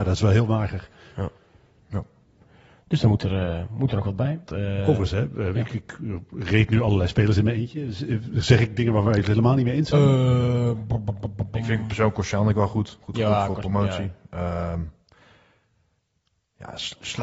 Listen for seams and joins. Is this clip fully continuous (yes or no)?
no